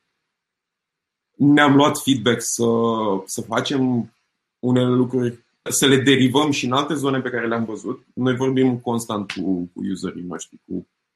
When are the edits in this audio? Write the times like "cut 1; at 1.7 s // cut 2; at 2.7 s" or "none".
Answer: cut 1; at 5.7 s